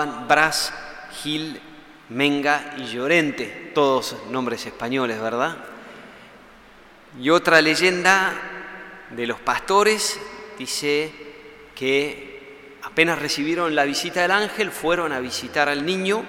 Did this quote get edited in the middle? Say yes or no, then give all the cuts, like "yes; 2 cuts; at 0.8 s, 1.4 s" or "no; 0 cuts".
no; 0 cuts